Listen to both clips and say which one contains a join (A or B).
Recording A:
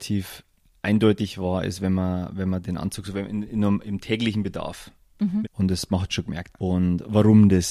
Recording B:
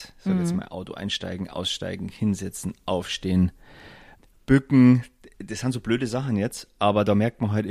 A